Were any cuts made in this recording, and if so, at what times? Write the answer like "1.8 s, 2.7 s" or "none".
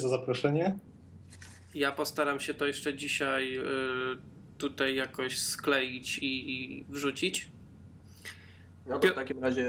6.2 s